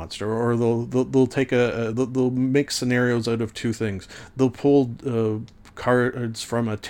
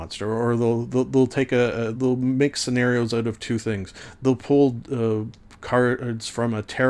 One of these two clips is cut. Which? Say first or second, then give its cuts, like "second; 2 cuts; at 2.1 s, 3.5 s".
second; 1 cut; at 1.9 s